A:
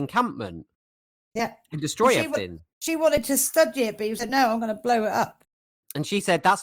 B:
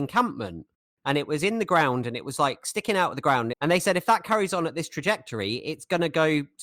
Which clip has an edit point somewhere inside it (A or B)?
B